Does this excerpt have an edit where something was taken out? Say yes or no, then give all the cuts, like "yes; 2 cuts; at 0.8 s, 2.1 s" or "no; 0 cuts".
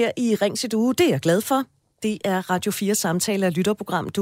no; 0 cuts